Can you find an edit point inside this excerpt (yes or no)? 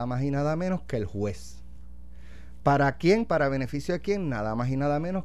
no